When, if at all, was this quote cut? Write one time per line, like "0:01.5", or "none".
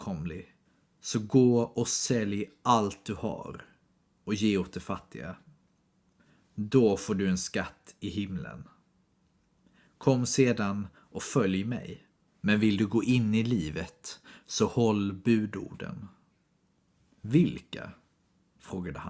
0:12.3